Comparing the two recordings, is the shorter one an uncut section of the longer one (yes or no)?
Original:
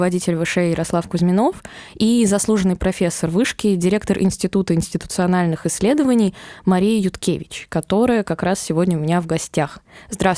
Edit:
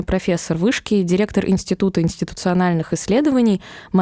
yes